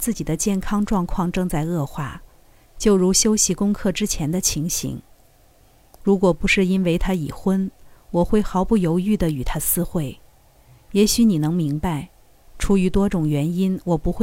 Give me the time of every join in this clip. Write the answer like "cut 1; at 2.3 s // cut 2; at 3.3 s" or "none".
none